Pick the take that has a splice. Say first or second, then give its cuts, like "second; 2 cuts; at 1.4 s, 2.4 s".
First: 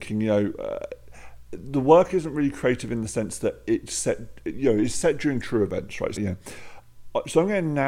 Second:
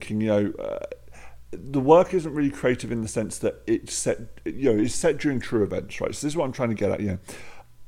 first; 1 cut; at 6.2 s